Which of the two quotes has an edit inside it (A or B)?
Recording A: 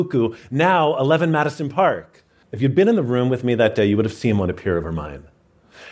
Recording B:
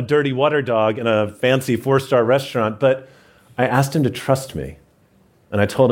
A